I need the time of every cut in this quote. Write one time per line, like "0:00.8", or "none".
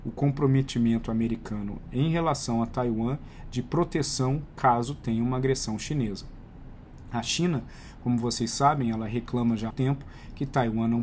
0:09.7